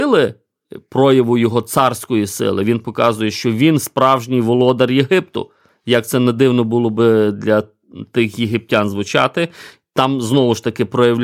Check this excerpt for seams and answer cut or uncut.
uncut